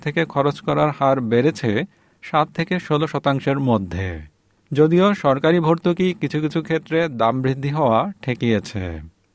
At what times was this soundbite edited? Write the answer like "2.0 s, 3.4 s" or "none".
none